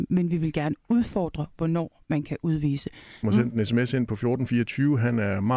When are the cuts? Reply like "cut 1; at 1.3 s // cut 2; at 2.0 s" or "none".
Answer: cut 1; at 3.2 s